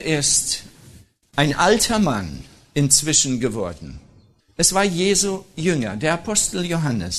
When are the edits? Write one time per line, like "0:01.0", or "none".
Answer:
none